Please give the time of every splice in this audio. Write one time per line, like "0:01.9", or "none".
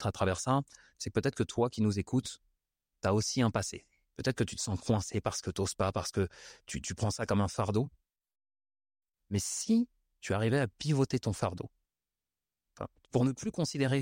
0:04.0
0:13.0